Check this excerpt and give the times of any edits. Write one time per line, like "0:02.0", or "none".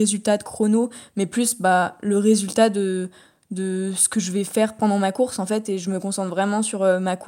none